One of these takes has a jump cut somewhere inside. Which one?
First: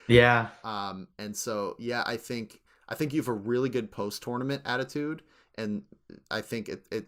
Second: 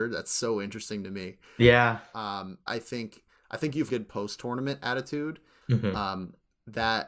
second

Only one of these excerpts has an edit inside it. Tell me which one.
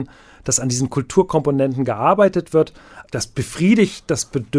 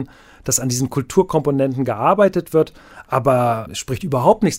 first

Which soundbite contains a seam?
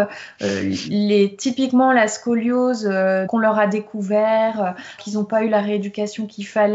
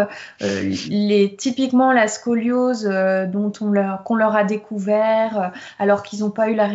first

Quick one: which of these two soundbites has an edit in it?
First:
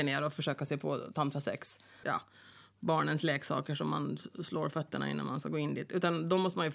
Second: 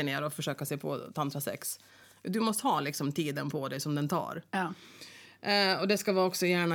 first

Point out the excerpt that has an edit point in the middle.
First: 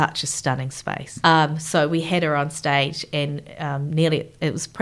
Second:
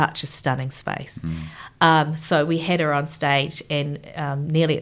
first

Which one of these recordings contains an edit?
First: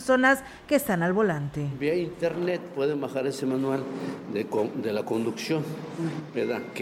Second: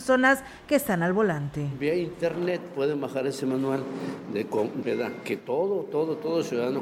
second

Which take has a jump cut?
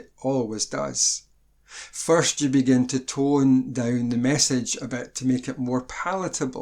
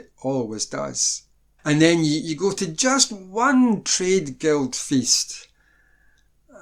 second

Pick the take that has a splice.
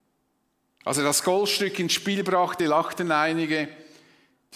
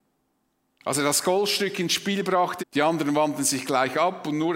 second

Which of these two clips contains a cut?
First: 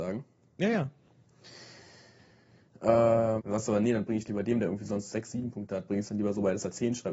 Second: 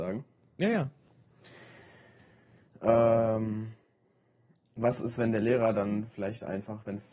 first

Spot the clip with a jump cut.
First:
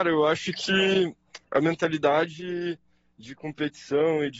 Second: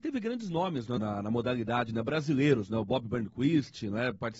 second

